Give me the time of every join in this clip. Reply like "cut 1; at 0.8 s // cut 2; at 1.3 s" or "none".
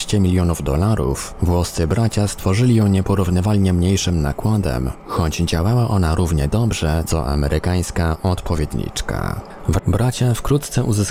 cut 1; at 9.8 s

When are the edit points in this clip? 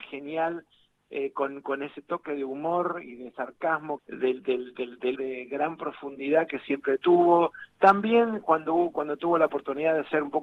cut 1; at 4.0 s // cut 2; at 5.1 s

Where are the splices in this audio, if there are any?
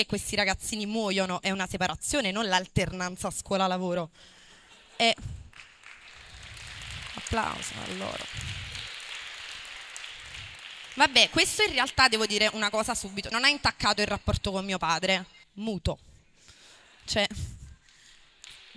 cut 1; at 13.3 s // cut 2; at 15.4 s

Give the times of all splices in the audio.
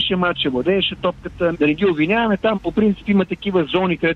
cut 1; at 1.5 s // cut 2; at 2.5 s

